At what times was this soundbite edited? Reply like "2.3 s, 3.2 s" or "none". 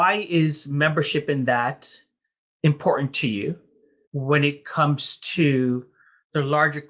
4.0 s